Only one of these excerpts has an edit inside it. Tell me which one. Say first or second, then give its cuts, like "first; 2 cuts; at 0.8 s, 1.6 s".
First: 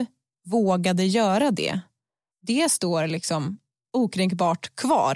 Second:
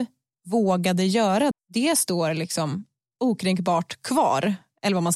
second; 1 cut; at 1.5 s